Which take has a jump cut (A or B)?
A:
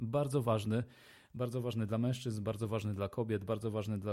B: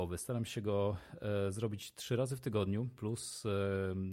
B